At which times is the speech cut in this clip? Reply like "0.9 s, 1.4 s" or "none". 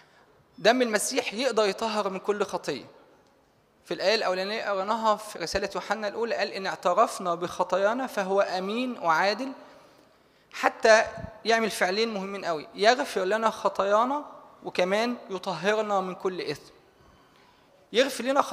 5.3 s